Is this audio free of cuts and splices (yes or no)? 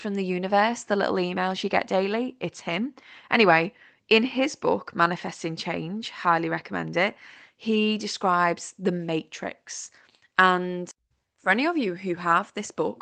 yes